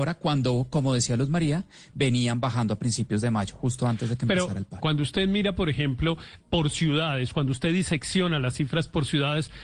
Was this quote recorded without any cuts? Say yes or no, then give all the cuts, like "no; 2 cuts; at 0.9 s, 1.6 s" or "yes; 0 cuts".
no; 1 cut; at 4.8 s